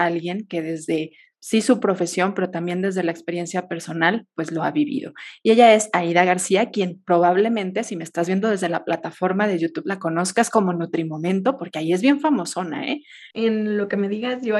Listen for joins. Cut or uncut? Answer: cut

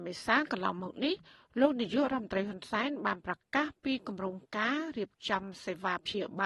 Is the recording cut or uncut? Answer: uncut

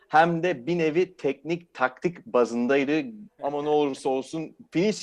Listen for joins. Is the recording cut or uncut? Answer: cut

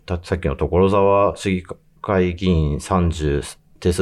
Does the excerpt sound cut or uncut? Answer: uncut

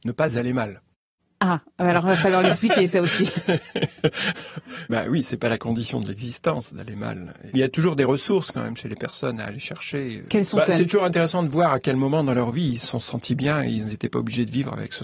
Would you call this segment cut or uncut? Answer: uncut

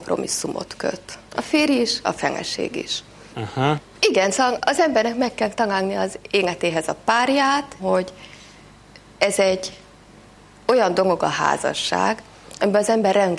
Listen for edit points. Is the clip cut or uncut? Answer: cut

